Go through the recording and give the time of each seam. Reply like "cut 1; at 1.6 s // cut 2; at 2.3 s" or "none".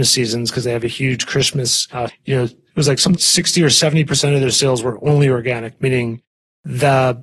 cut 1; at 2.1 s // cut 2; at 3.1 s